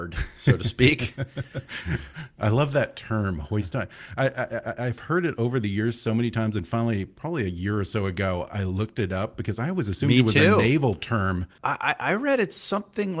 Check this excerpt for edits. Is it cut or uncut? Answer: uncut